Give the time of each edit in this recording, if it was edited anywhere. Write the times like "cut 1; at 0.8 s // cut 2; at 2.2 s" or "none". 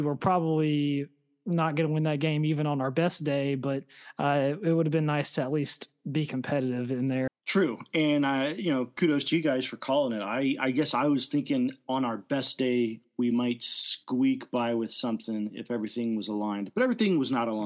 cut 1; at 7.3 s